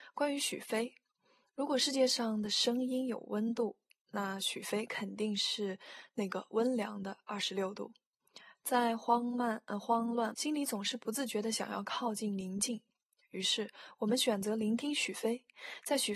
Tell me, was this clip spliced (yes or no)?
yes